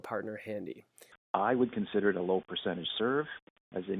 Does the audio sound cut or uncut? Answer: cut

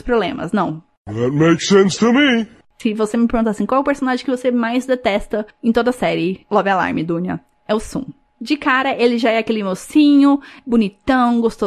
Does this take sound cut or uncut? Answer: uncut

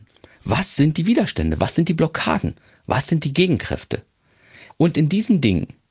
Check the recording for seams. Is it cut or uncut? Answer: cut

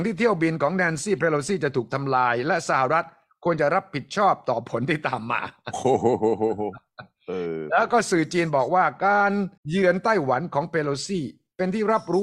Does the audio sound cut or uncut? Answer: cut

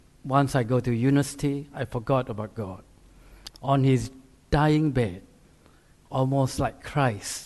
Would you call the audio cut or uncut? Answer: cut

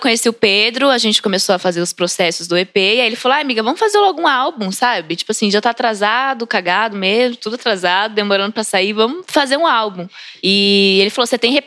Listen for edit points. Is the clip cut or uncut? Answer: uncut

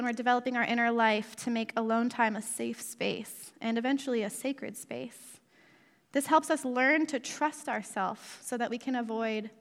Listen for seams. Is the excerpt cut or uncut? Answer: uncut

